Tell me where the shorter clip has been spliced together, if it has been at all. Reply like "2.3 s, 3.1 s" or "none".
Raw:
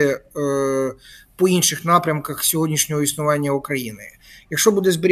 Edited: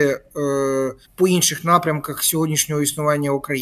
1.0 s